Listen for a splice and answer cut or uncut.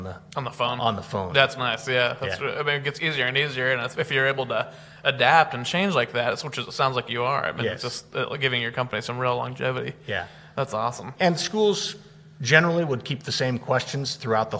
uncut